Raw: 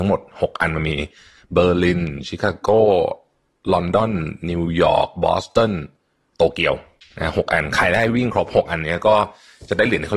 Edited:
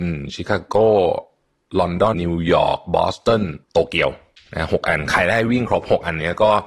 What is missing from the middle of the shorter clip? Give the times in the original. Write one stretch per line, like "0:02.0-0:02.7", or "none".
0:04.1-0:04.4
0:05.9-0:06.3